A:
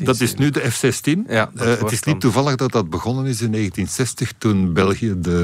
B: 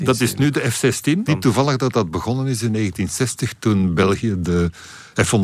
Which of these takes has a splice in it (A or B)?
B